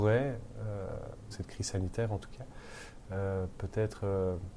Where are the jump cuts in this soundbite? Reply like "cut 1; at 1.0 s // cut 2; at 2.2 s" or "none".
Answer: cut 1; at 1.3 s